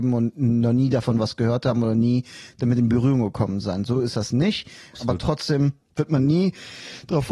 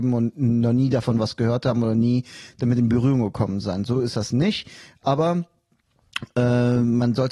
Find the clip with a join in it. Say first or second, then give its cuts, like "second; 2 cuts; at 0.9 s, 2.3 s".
first; 1 cut; at 4.9 s